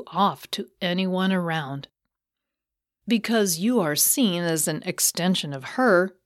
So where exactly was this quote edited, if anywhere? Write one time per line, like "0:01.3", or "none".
none